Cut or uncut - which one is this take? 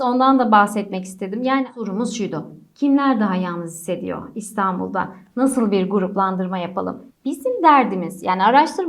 cut